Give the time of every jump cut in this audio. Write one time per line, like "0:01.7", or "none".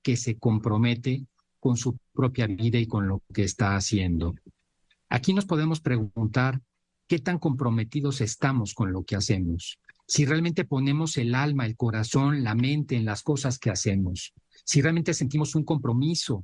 none